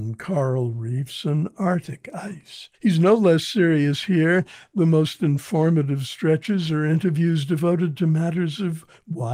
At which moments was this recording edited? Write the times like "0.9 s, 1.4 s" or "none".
2.7 s